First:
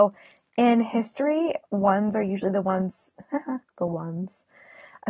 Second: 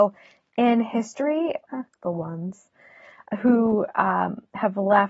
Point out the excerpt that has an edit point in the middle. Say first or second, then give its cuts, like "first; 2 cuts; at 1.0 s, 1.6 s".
second; 1 cut; at 1.7 s